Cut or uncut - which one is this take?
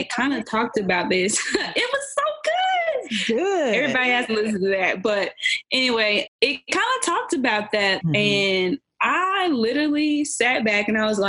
cut